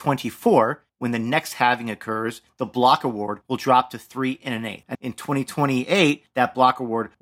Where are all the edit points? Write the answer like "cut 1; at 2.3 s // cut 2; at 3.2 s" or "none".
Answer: cut 1; at 5.0 s